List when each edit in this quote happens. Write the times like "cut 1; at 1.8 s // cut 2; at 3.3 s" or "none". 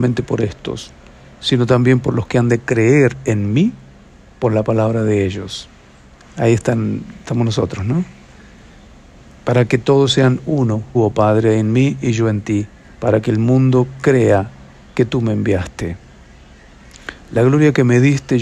cut 1; at 10.9 s // cut 2; at 12.9 s